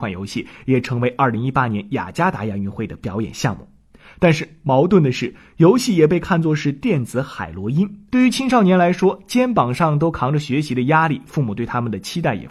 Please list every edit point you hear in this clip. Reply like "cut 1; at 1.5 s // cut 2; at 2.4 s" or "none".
cut 1; at 8.1 s

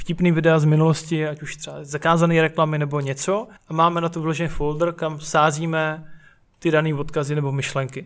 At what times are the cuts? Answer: cut 1; at 3.6 s

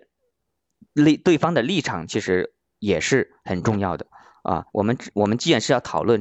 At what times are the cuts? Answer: cut 1; at 4.7 s

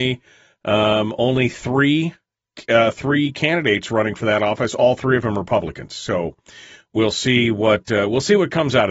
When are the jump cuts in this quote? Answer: none

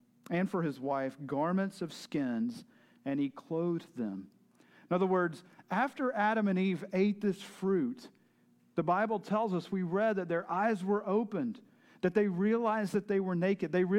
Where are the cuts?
none

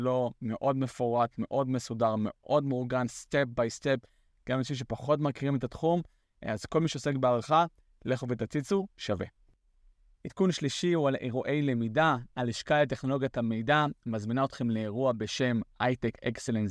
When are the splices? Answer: none

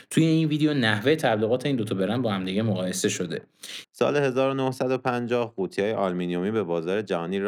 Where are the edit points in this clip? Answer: cut 1; at 3.8 s

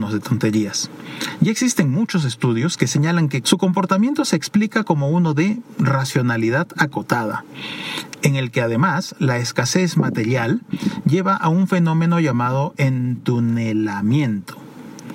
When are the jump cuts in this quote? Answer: cut 1; at 3.4 s

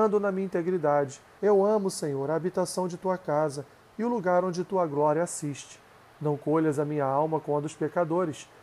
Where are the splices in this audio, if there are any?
cut 1; at 1.4 s

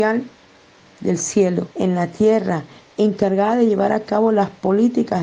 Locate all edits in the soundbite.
cut 1; at 1.7 s

